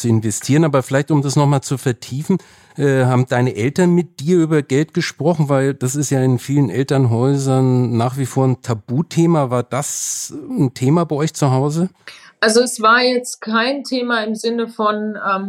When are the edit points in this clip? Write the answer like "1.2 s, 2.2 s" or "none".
none